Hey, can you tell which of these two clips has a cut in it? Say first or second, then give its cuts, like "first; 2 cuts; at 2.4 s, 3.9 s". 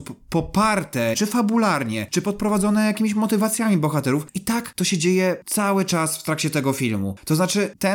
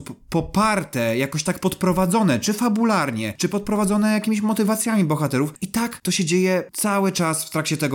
first; 1 cut; at 1.1 s